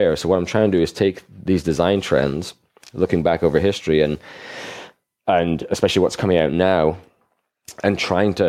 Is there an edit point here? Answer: no; 0 cuts

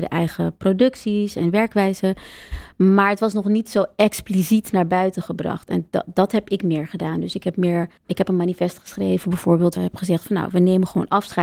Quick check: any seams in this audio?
yes; 2 cuts; at 8.0 s, 9.8 s

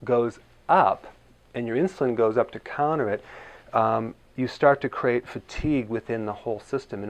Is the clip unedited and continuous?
yes; 0 cuts

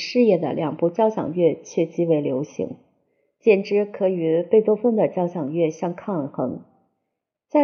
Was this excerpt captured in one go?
yes; 0 cuts

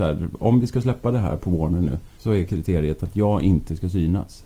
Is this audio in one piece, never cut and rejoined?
no; 1 cut; at 2.1 s

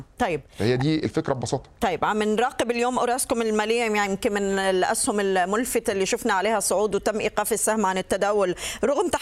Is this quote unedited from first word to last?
yes; 0 cuts

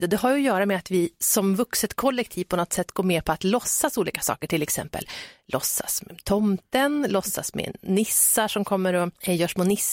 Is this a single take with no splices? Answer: yes; 0 cuts

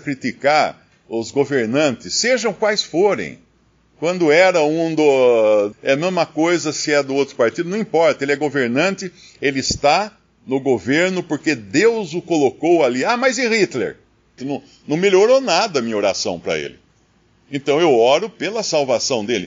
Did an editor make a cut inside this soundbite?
yes; 2 cuts; at 5.7 s, 14.4 s

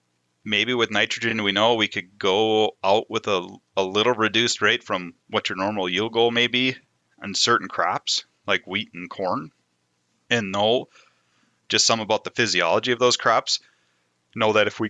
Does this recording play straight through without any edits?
yes; 0 cuts

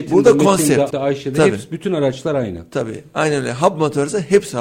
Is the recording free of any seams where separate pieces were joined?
no; 1 cut; at 0.9 s

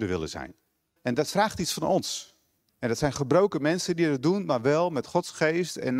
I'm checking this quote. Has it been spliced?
yes; 2 cuts; at 1.0 s, 2.7 s

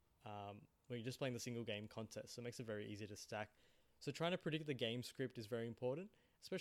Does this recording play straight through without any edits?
yes; 0 cuts

